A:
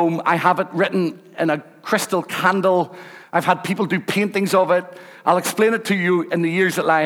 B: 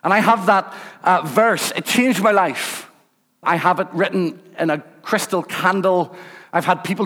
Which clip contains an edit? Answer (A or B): B